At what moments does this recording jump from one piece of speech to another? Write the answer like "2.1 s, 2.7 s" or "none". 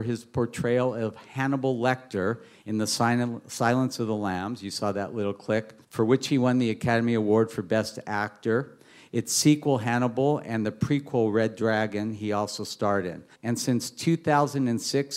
5.8 s, 13.3 s